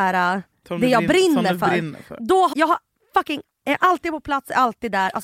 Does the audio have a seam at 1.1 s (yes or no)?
no